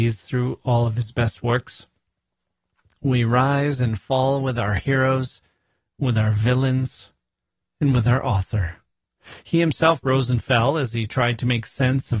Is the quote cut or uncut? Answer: uncut